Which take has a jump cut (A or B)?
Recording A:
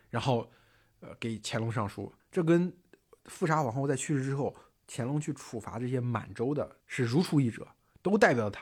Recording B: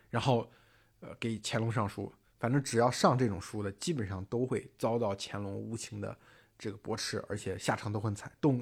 A